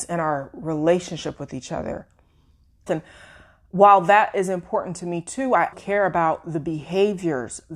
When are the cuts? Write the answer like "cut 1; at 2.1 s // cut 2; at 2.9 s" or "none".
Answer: cut 1; at 2.9 s // cut 2; at 5.7 s